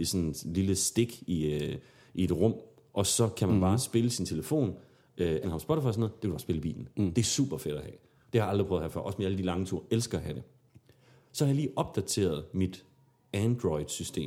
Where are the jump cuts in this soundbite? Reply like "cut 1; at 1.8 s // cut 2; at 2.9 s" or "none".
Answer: cut 1; at 5.4 s